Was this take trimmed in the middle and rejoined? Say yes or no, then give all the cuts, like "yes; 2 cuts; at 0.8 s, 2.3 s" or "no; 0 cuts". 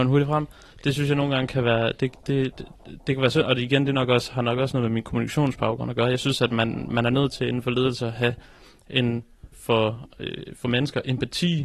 yes; 1 cut; at 9.5 s